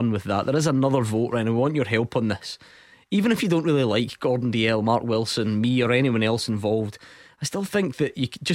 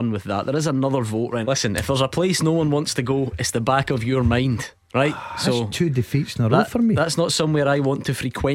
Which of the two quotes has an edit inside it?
second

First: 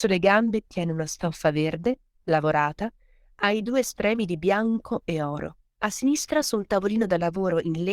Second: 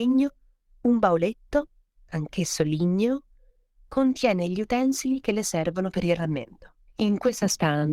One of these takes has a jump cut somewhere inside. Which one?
first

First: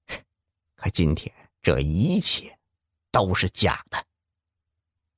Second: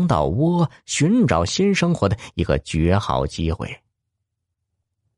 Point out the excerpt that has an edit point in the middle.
first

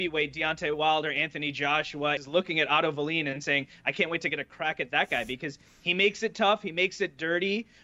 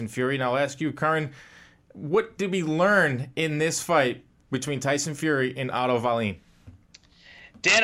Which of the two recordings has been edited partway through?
first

